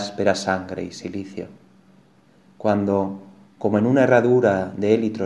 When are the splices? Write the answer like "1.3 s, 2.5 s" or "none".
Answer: none